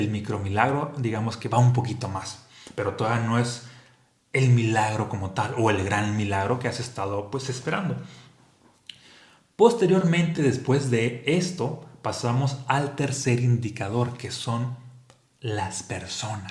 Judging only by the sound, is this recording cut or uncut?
uncut